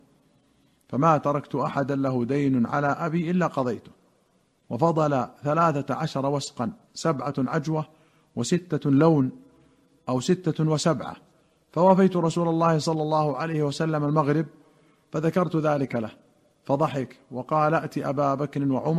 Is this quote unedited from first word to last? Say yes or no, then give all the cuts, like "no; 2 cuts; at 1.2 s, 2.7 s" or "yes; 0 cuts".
yes; 0 cuts